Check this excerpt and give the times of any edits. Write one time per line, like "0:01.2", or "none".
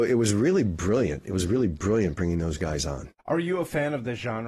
0:03.2